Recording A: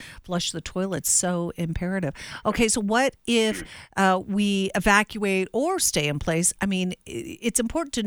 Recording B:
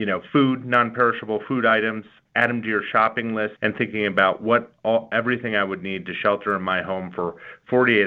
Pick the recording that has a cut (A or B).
B